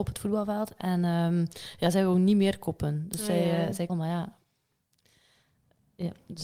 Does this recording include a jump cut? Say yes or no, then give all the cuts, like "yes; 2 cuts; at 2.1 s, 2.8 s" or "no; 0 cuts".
yes; 1 cut; at 3.9 s